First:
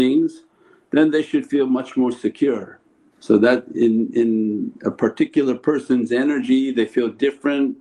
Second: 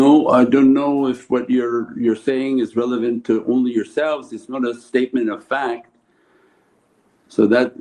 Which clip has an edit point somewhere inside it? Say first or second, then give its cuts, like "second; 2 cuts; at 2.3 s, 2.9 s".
first; 1 cut; at 3.1 s